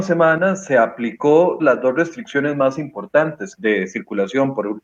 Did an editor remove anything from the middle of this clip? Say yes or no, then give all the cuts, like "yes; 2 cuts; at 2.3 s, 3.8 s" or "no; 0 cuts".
yes; 2 cuts; at 1.6 s, 3.6 s